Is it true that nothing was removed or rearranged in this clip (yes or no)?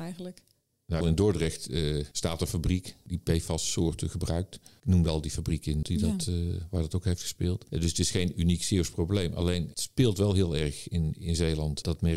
no